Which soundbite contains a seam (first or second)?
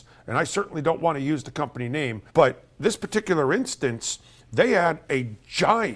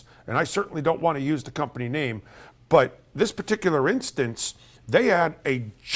first